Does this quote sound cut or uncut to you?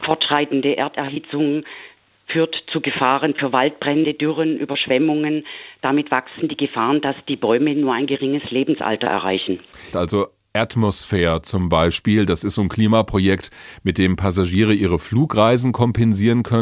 cut